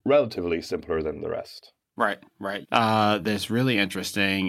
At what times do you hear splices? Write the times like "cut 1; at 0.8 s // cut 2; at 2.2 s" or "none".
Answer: cut 1; at 2.6 s